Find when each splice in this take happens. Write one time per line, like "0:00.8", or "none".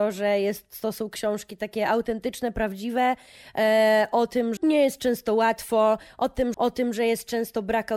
0:04.6
0:06.5